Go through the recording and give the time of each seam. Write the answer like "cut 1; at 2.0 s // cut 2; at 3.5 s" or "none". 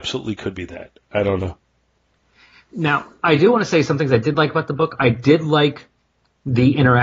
none